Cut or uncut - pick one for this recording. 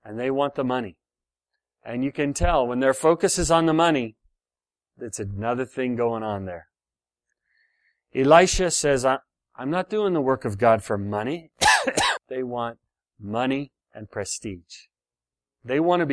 cut